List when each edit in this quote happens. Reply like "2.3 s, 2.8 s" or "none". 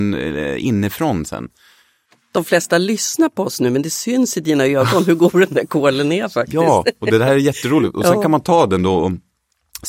none